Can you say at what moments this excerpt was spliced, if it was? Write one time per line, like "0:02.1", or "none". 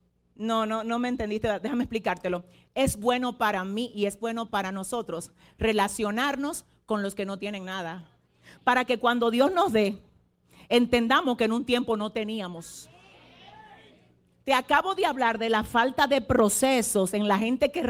none